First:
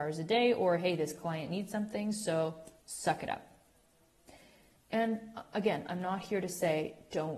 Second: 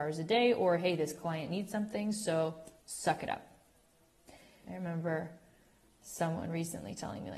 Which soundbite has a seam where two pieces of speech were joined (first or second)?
second